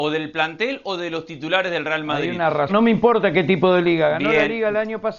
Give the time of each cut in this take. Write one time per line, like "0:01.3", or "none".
0:02.7